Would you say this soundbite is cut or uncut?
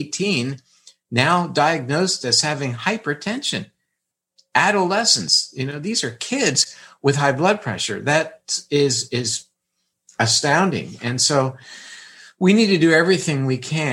uncut